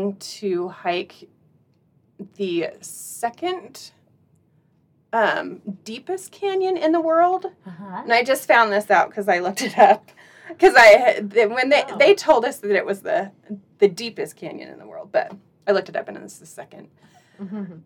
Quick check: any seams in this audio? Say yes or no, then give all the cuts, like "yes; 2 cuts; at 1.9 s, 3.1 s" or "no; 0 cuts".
no; 0 cuts